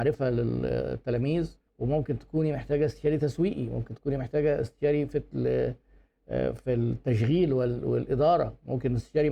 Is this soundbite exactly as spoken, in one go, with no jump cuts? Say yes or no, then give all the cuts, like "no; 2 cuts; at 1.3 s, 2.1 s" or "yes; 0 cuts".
no; 1 cut; at 1.7 s